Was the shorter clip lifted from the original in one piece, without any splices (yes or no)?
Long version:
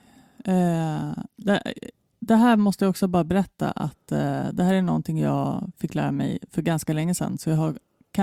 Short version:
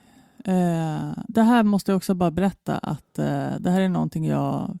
no